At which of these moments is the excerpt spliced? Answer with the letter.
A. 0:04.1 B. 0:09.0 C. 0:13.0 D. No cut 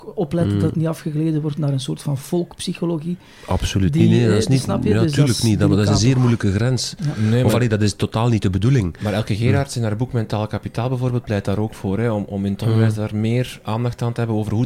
D